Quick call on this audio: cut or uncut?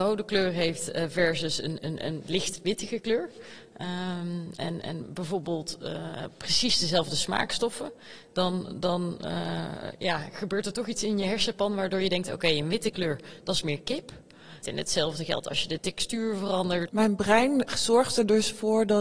cut